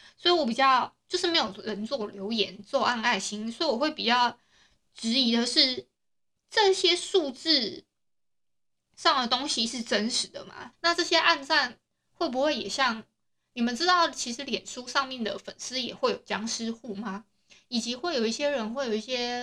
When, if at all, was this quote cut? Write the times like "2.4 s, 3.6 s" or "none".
10.7 s